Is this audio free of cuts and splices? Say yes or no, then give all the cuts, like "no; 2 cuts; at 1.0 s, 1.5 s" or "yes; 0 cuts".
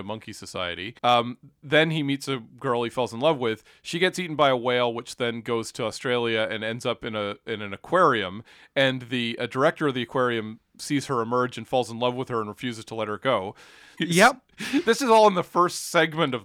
no; 2 cuts; at 1.0 s, 14.0 s